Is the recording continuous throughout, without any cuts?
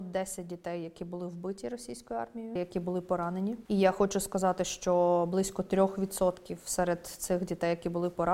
no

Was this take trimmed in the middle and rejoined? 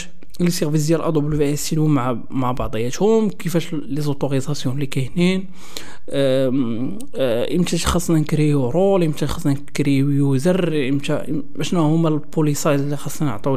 no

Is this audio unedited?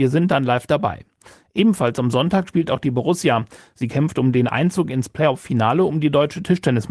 yes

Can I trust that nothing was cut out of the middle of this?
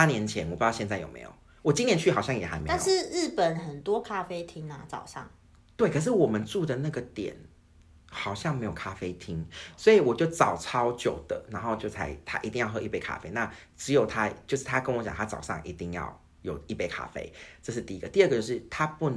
yes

